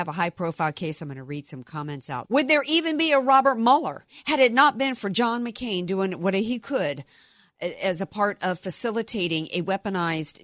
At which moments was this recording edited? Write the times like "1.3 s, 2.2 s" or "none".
1.0 s, 2.3 s